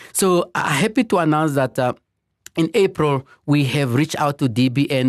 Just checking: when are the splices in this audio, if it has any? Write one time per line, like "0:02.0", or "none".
none